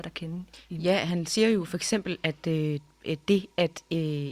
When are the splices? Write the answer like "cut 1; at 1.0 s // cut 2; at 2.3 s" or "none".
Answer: none

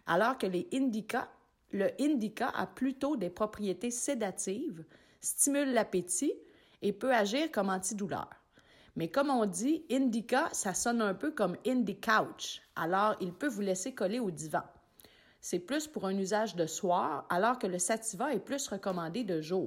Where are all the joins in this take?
none

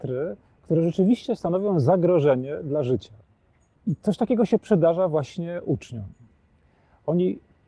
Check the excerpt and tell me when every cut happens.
none

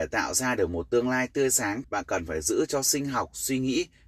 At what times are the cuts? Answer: cut 1; at 1.8 s

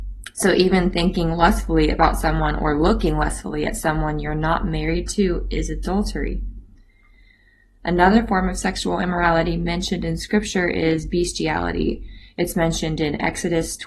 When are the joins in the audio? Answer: none

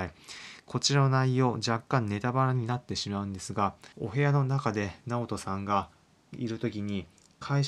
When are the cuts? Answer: cut 1; at 3.9 s

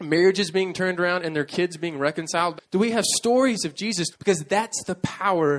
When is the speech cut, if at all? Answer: cut 1; at 2.6 s // cut 2; at 4.1 s

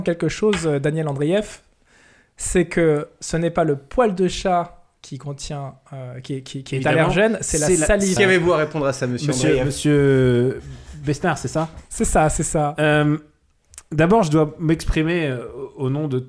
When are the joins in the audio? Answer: cut 1; at 8.2 s

